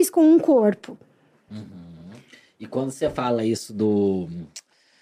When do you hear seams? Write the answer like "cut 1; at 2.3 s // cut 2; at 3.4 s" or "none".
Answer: none